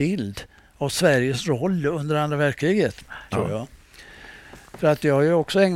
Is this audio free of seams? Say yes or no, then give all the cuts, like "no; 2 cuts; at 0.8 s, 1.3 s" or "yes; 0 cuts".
no; 1 cut; at 3.3 s